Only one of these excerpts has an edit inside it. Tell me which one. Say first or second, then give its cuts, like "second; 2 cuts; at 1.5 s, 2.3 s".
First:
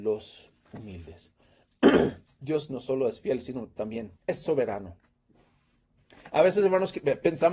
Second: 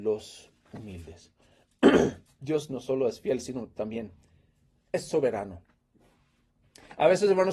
first; 1 cut; at 4.2 s